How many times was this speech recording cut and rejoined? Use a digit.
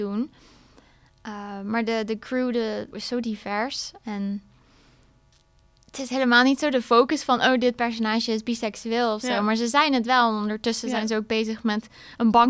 1